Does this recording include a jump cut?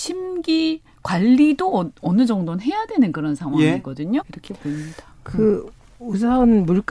yes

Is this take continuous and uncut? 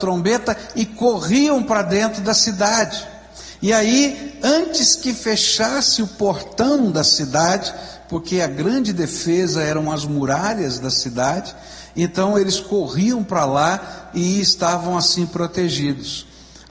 yes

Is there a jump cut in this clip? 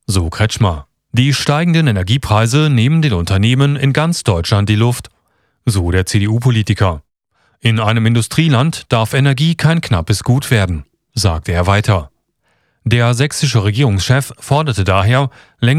yes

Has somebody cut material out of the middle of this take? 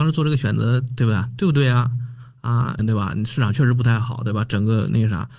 yes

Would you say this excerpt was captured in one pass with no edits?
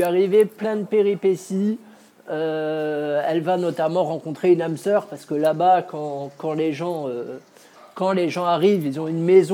yes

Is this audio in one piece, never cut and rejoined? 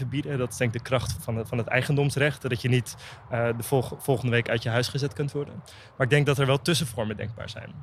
no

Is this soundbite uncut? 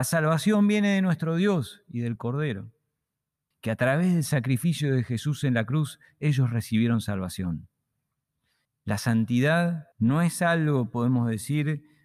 no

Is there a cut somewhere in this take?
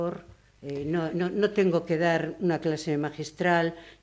no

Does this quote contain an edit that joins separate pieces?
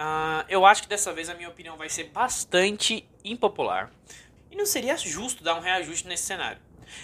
yes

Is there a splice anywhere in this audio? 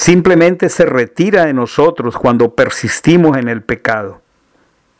no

